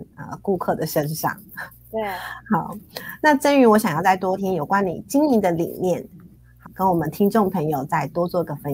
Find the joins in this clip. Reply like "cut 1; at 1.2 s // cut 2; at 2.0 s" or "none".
cut 1; at 4.4 s // cut 2; at 6.6 s